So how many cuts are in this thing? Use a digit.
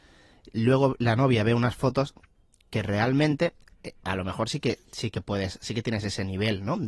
0